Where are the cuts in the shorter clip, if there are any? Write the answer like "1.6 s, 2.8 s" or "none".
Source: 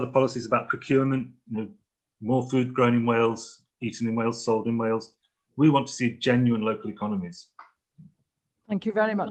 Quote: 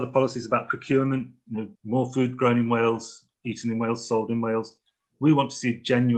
1.7 s